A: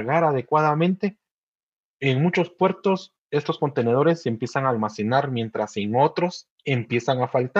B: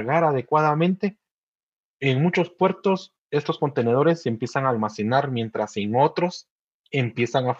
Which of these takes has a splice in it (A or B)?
A